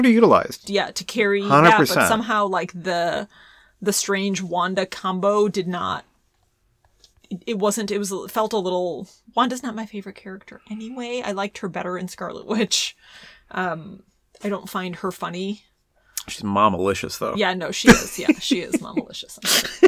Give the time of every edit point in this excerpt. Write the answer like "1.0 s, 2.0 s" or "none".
none